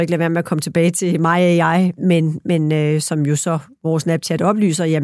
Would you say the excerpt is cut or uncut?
cut